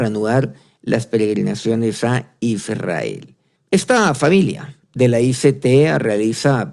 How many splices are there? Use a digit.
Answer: 1